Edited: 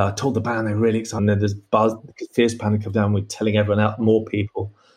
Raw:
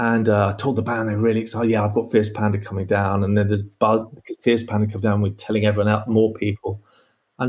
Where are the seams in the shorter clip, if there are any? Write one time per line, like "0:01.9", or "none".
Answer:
0:01.2